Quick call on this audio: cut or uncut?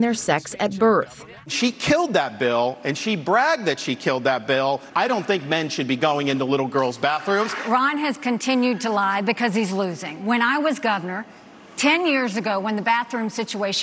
uncut